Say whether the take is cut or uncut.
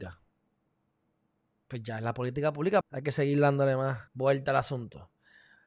cut